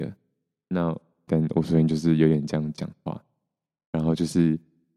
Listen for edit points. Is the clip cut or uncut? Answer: cut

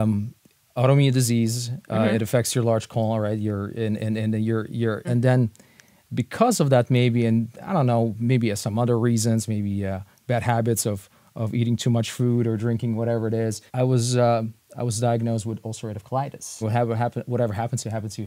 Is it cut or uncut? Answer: cut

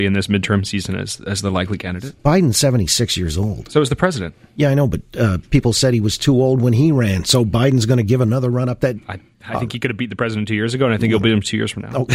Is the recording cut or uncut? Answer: cut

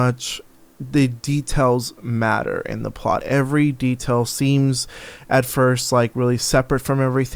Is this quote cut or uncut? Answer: uncut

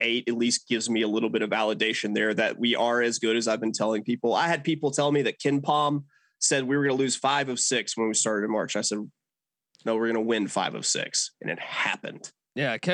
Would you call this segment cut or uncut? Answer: uncut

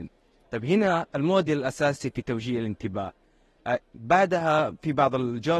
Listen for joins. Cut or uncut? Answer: uncut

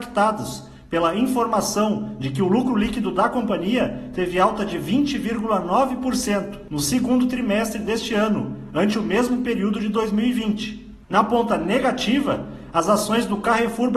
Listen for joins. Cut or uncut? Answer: cut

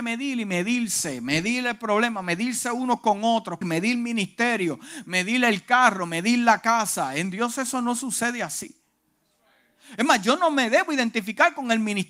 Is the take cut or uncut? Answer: cut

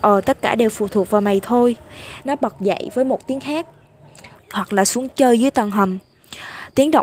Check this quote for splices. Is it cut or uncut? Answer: cut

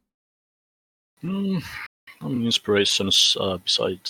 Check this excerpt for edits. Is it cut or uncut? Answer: uncut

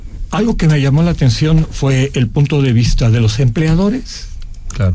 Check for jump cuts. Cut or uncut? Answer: uncut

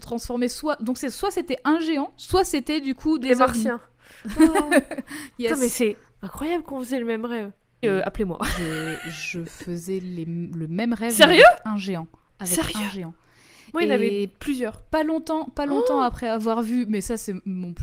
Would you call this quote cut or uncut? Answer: cut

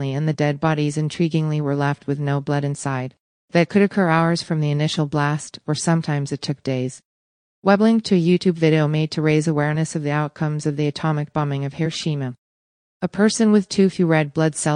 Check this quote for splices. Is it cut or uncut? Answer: uncut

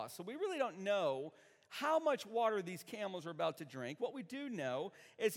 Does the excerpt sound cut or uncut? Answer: uncut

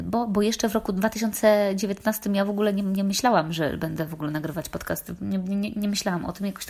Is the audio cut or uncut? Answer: uncut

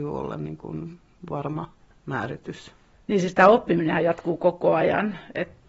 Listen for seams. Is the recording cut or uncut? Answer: uncut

